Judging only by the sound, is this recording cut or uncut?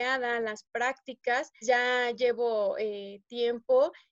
cut